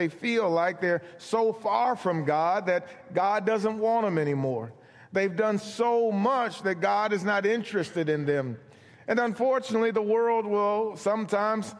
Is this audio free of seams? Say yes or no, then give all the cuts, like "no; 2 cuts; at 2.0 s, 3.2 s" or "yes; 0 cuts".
yes; 0 cuts